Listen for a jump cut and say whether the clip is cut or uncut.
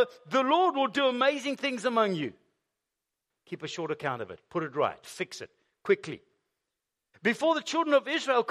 cut